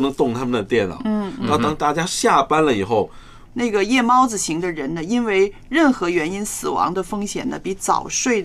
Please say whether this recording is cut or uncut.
cut